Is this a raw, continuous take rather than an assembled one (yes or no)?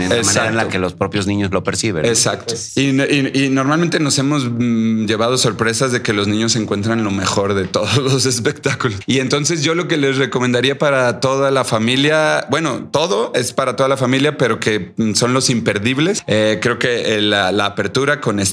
yes